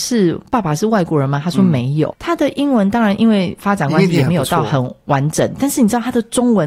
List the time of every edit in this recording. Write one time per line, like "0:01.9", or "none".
0:02.1
0:05.6